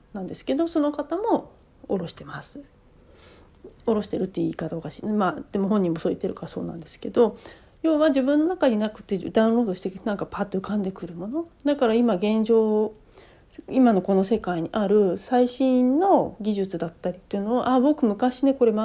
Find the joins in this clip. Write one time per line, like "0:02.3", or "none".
none

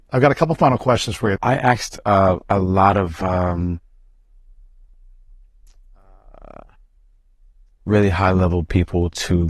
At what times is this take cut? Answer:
0:01.4

